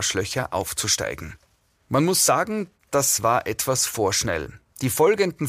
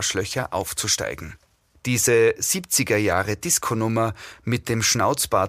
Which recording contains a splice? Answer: second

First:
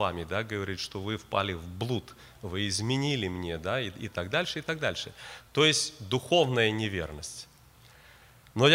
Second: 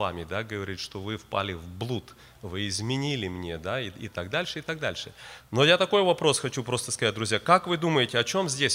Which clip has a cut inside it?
second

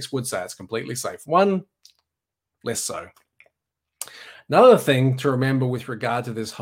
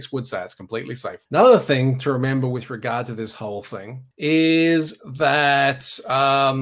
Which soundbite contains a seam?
second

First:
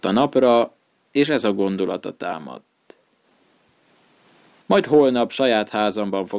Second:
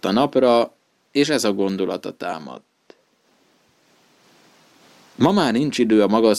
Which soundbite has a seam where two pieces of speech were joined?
first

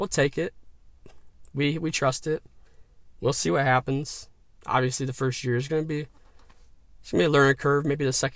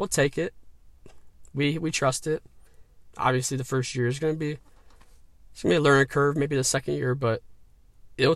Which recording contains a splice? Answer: second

